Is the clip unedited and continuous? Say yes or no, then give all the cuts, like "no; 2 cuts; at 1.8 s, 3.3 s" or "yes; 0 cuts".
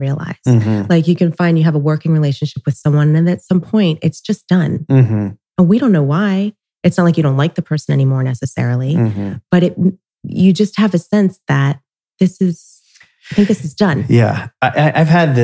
yes; 0 cuts